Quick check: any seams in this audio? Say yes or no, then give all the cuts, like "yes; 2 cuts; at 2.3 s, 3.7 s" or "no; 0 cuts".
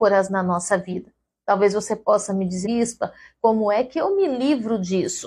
yes; 1 cut; at 2.6 s